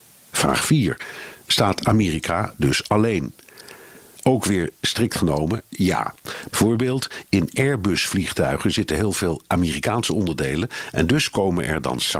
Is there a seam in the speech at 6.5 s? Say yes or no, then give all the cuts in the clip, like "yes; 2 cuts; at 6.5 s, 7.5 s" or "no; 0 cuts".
yes; 1 cut; at 6.5 s